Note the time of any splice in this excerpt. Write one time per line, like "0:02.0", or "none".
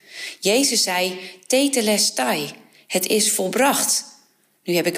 none